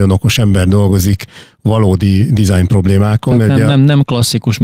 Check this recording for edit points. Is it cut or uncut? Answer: uncut